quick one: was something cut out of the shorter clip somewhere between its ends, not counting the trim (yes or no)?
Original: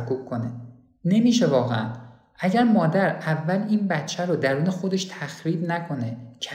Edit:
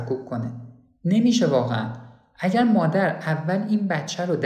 no